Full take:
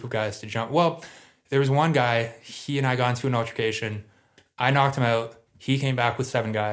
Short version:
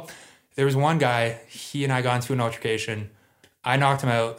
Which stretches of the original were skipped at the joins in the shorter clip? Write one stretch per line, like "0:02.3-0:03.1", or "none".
none